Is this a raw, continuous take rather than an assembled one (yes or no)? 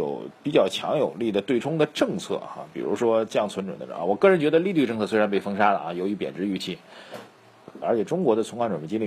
no